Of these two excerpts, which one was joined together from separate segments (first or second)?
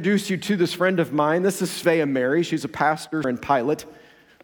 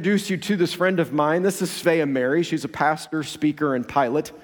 first